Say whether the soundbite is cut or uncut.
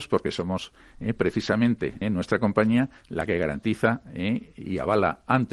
cut